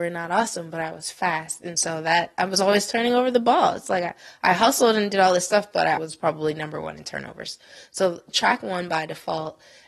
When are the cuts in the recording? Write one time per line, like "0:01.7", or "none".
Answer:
0:06.0